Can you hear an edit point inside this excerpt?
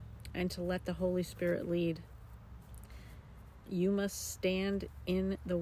yes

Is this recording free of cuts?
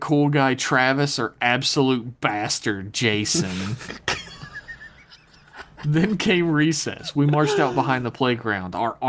yes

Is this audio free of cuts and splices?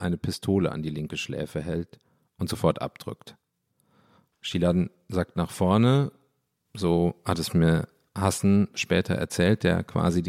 yes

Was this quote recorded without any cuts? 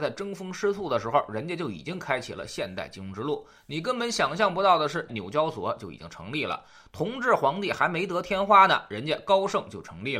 no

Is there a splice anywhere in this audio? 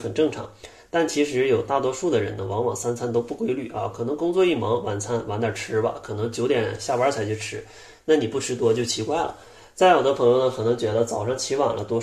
no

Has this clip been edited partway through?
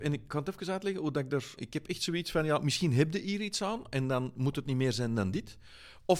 yes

